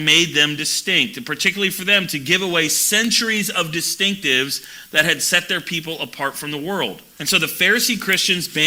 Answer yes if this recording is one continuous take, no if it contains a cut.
no